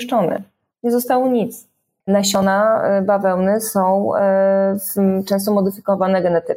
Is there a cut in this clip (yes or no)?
yes